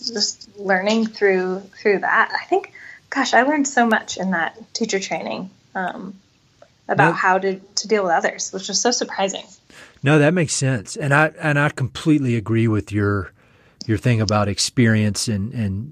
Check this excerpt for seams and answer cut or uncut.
uncut